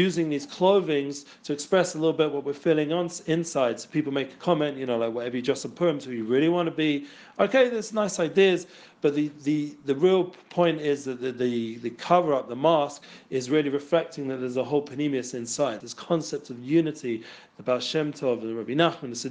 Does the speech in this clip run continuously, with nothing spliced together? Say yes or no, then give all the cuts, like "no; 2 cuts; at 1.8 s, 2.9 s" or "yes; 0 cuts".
no; 2 cuts; at 15.8 s, 17.5 s